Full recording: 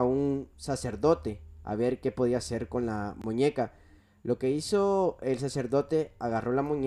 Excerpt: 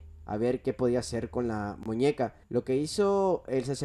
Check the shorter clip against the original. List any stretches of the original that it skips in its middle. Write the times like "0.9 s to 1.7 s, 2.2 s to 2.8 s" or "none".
3.8 s to 4.2 s